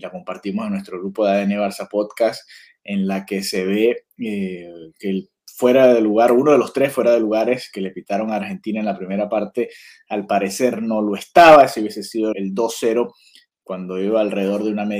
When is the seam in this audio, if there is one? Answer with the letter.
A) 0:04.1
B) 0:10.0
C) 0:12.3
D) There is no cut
C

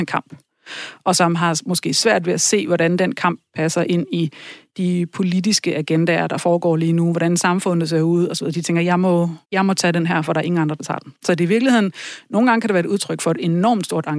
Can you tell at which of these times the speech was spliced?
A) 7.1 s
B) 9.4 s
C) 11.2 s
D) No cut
B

